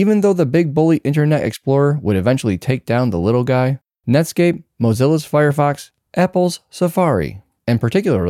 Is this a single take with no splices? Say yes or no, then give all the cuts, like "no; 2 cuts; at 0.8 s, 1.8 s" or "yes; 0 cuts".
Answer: yes; 0 cuts